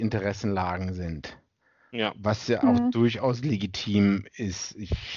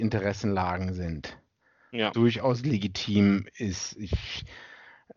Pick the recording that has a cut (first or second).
second